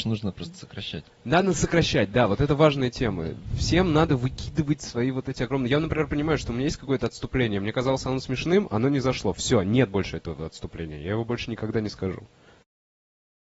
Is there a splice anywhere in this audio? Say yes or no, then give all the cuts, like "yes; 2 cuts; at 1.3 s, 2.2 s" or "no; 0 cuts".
no; 0 cuts